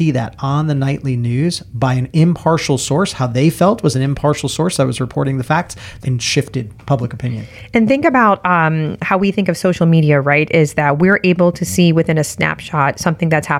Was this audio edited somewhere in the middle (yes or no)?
yes